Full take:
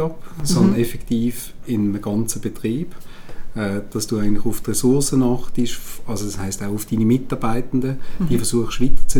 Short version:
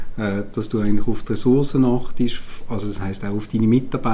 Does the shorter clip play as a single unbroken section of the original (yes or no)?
yes